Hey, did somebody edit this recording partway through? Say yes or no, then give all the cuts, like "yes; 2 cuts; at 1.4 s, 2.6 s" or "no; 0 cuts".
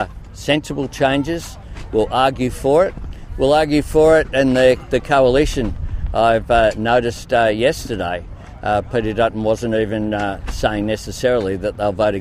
no; 0 cuts